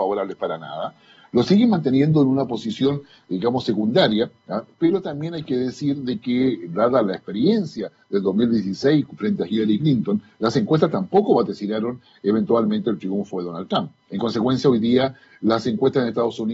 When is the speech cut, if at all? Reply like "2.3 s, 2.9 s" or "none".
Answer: none